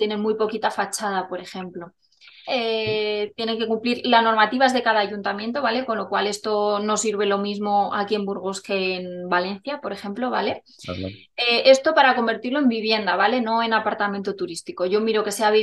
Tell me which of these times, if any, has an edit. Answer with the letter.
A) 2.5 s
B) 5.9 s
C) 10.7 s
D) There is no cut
A